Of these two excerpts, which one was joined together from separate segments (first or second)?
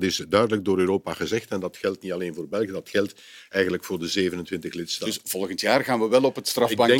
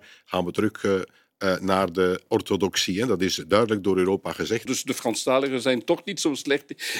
second